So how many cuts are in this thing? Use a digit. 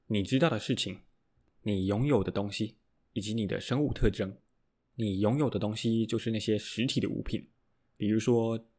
1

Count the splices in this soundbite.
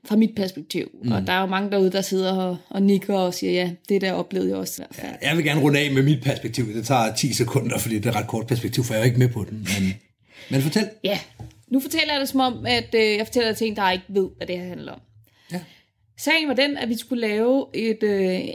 1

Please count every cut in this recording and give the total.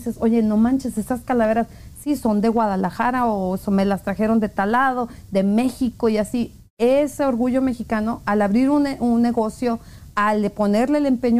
0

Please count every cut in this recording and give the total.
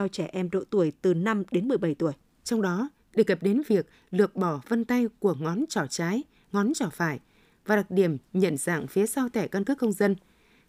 1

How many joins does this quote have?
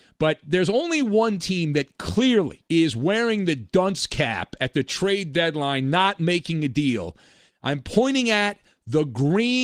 2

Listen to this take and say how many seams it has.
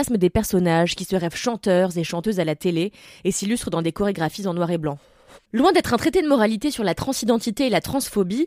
1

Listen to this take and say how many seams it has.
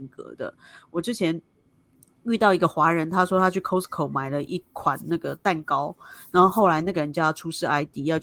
0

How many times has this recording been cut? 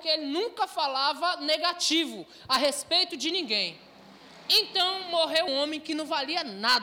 1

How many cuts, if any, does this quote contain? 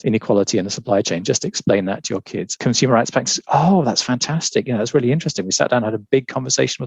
0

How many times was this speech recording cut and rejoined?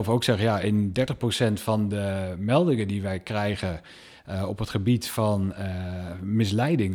0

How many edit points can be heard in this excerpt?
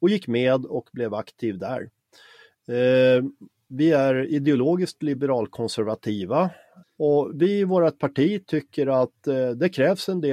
1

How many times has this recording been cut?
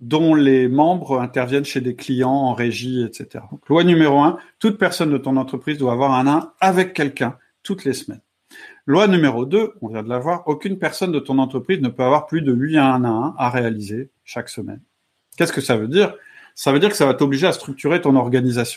1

